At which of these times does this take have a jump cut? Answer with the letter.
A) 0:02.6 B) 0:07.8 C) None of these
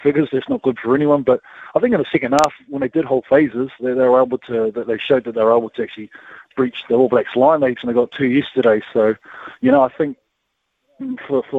B